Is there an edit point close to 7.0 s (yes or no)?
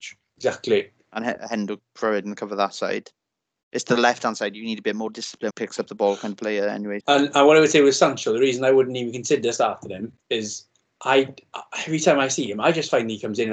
yes